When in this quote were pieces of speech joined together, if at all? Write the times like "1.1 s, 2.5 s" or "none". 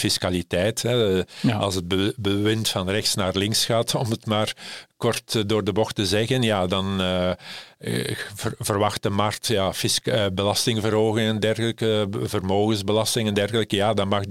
none